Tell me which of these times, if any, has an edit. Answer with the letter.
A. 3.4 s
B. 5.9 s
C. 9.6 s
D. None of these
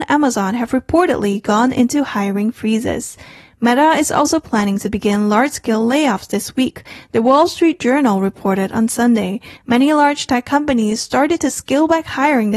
C